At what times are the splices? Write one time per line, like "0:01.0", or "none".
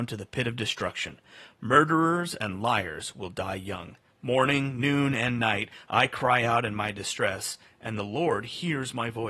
0:04.1